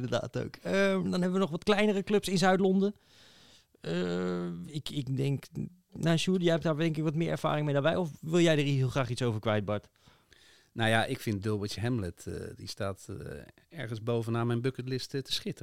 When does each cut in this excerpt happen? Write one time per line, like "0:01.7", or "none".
none